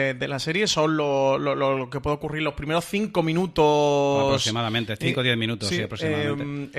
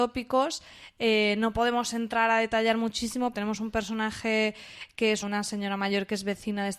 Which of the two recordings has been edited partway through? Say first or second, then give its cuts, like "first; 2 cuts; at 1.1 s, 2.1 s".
second; 2 cuts; at 3.3 s, 5.2 s